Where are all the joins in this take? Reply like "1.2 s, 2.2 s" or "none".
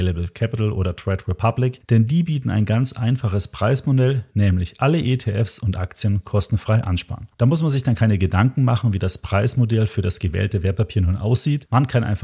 none